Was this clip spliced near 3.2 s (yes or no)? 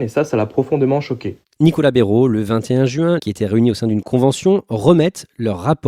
yes